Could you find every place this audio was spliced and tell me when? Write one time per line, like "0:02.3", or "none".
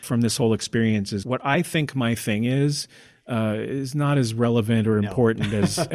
0:01.2